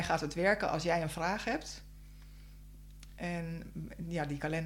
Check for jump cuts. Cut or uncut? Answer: uncut